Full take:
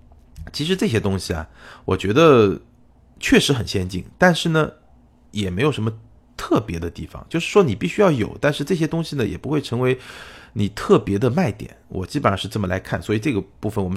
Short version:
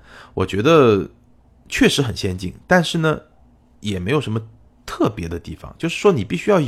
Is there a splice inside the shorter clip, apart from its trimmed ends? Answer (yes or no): no